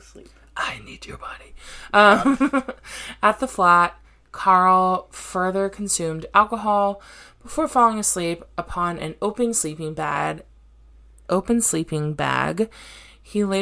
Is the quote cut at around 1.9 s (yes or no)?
no